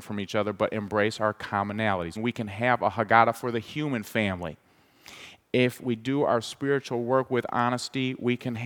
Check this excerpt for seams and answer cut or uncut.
cut